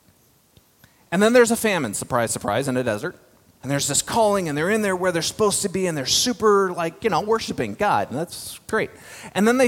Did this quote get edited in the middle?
yes; 1 cut; at 3.6 s

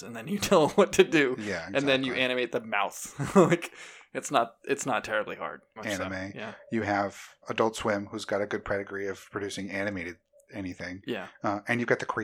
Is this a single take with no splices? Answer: no; 2 cuts; at 5.8 s, 7.4 s

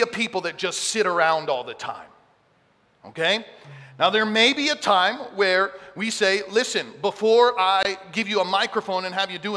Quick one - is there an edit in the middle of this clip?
no; 0 cuts

